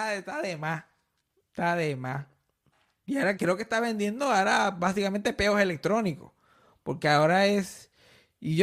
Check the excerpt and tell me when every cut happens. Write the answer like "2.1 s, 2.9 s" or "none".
3.4 s